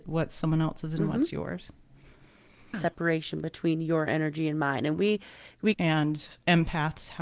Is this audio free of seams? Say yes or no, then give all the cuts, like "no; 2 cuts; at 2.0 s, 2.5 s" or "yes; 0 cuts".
no; 2 cuts; at 2.7 s, 5.7 s